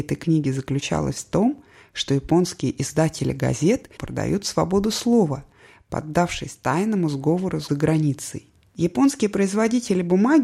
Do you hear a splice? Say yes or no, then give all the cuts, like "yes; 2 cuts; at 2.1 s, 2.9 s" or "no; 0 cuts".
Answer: yes; 2 cuts; at 4.0 s, 8.7 s